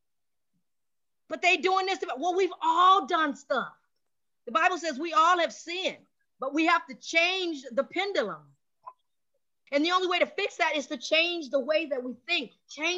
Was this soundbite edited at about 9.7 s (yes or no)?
yes